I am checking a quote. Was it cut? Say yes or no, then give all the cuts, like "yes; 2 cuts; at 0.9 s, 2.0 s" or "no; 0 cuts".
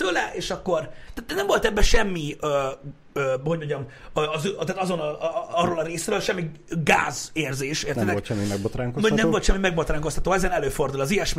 no; 0 cuts